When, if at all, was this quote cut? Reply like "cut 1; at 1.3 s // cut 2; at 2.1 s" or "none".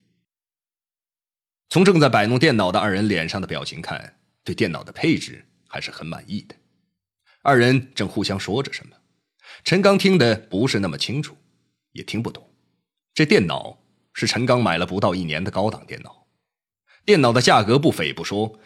cut 1; at 13.0 s